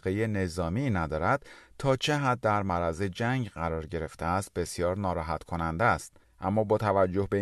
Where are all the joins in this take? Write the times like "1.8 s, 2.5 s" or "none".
6.2 s